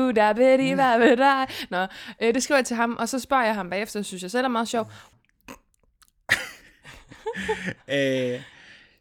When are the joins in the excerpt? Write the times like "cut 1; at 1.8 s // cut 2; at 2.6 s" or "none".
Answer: cut 1; at 5.1 s